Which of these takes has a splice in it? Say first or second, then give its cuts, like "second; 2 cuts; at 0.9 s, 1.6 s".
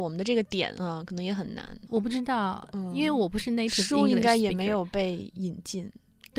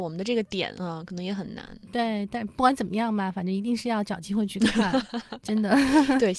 first; 1 cut; at 1.9 s